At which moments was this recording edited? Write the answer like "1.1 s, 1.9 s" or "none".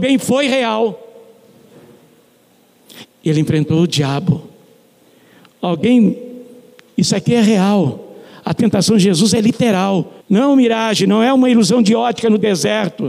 3.0 s, 10.2 s